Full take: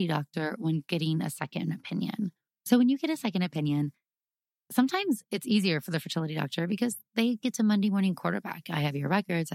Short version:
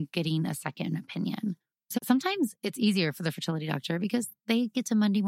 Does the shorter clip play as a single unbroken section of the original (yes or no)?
no